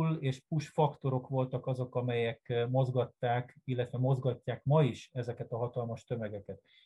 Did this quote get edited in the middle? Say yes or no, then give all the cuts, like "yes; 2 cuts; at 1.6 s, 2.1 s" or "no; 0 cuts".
no; 0 cuts